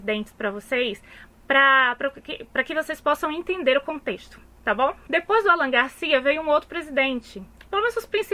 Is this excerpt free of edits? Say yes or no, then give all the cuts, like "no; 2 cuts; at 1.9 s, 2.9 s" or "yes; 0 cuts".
no; 1 cut; at 5.1 s